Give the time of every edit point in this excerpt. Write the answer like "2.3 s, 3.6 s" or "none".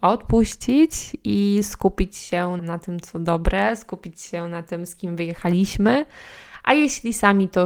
2.6 s